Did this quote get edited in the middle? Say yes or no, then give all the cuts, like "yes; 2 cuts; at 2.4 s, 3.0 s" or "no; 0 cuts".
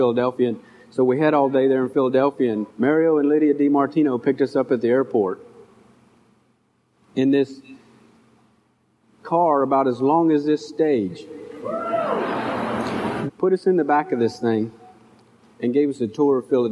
yes; 2 cuts; at 2.7 s, 13.3 s